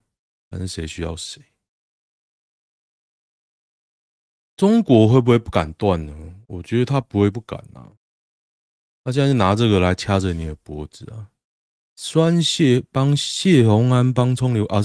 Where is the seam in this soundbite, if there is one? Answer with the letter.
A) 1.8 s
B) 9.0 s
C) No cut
C